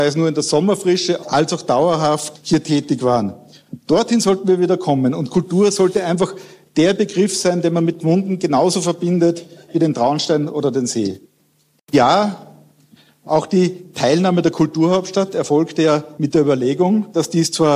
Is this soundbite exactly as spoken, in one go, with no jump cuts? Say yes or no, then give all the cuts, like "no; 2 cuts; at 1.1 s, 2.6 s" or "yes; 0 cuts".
no; 1 cut; at 11.8 s